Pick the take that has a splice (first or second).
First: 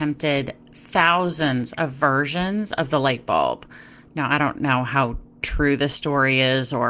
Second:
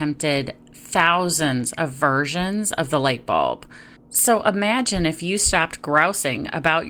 second